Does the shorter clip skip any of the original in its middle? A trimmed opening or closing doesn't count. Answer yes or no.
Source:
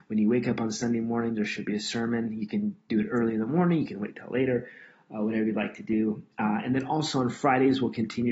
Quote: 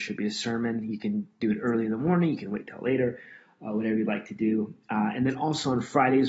no